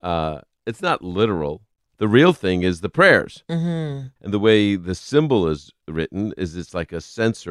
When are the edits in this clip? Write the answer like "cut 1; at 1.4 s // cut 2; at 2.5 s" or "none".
cut 1; at 1.9 s // cut 2; at 4.2 s